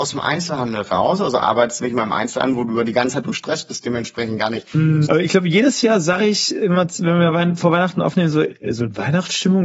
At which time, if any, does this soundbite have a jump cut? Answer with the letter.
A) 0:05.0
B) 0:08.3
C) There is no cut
A